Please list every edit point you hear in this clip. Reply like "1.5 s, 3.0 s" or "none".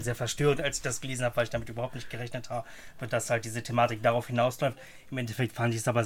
none